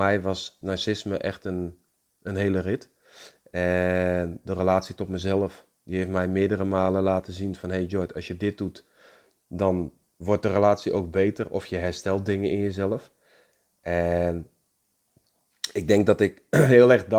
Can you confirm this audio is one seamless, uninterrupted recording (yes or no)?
yes